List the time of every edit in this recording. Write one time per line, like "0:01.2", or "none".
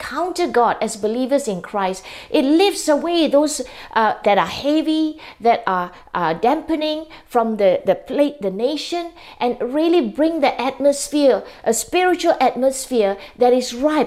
0:04.2